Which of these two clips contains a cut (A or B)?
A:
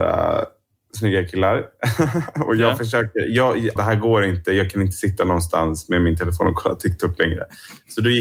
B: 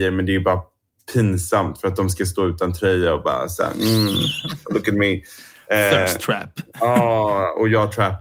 A